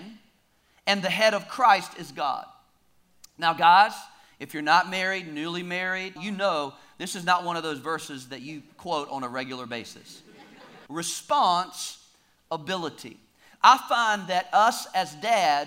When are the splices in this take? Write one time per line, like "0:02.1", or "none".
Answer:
0:06.2
0:10.9